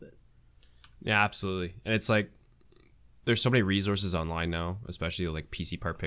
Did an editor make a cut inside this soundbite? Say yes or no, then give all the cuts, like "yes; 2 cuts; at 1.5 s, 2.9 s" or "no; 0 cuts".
no; 0 cuts